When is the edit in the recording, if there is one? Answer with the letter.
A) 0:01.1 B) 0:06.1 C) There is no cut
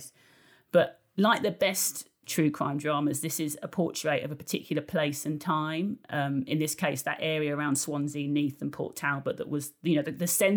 C